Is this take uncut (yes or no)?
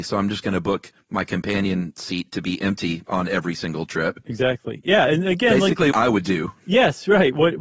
no